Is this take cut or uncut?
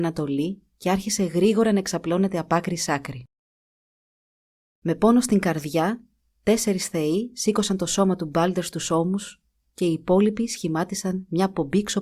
uncut